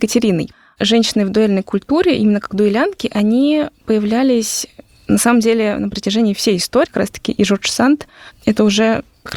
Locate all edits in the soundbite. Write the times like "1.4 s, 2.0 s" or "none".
6.9 s